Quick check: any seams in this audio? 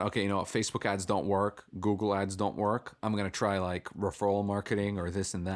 no; 0 cuts

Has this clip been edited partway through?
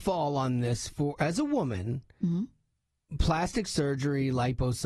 no; 0 cuts

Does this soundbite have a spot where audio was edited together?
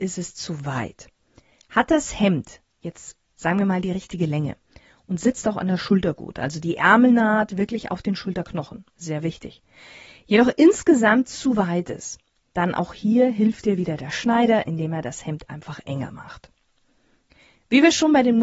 no; 0 cuts

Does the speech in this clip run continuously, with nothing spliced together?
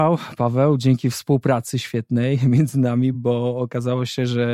yes; 0 cuts

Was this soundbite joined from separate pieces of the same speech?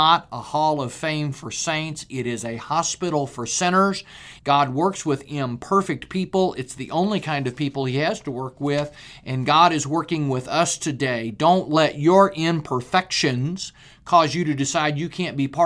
yes; 1 cut; at 4.4 s

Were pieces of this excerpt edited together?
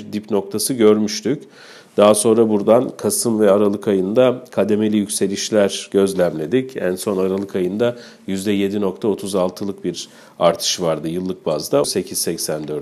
yes; 1 cut; at 11.8 s

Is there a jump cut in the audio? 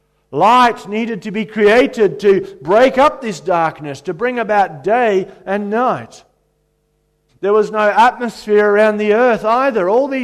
yes; 1 cut; at 7.3 s

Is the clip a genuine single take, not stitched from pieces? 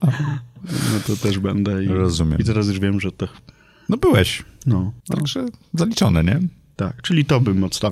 no; 1 cut; at 5.0 s

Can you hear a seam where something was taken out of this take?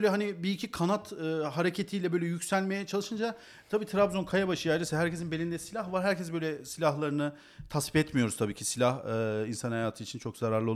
no; 0 cuts

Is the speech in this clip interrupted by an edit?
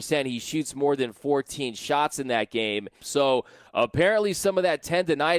yes; 1 cut; at 3.0 s

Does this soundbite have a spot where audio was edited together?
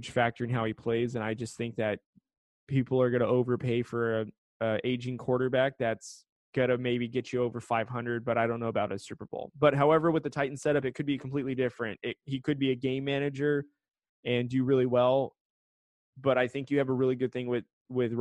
no; 0 cuts

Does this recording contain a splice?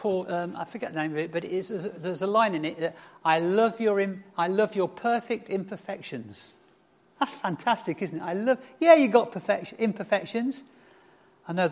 no; 0 cuts

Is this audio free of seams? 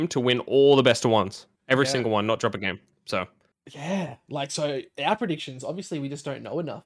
yes; 0 cuts

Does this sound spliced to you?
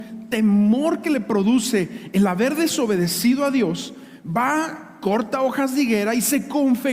no; 0 cuts

